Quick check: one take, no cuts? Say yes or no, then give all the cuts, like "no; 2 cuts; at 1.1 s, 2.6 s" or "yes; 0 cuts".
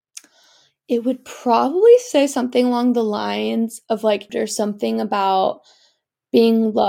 no; 1 cut; at 4.3 s